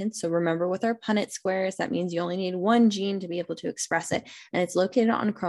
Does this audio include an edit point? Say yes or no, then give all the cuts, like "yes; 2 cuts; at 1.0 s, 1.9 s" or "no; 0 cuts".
no; 0 cuts